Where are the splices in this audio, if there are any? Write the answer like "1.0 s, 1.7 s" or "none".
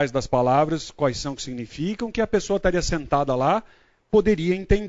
none